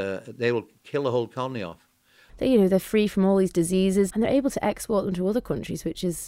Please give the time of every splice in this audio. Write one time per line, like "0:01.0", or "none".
0:02.3
0:04.1